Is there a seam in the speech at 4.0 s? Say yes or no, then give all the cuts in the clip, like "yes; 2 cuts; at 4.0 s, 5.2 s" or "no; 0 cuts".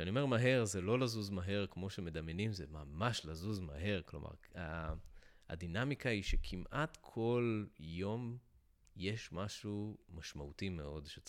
no; 0 cuts